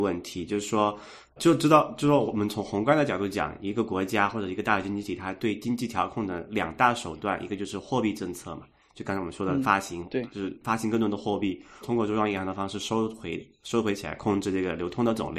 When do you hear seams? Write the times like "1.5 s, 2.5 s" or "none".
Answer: 1.4 s, 11.8 s